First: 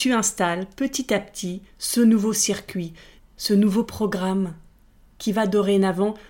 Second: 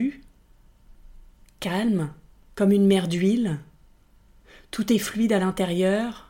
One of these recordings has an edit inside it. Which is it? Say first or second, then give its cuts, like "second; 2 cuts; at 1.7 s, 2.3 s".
first; 1 cut; at 3.2 s